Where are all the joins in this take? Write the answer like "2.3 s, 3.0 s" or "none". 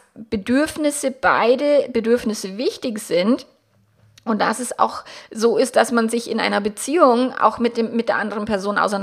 none